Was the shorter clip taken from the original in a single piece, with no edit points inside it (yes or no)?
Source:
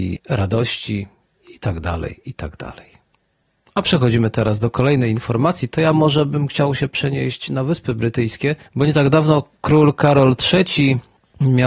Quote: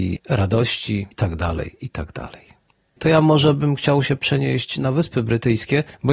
no